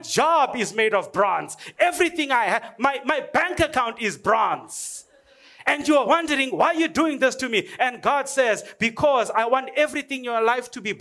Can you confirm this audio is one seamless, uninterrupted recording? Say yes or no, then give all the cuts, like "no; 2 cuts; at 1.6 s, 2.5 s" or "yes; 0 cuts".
yes; 0 cuts